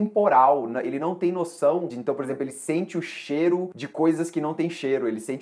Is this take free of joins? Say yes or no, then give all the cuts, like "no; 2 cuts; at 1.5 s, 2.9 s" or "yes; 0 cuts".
no; 1 cut; at 1.9 s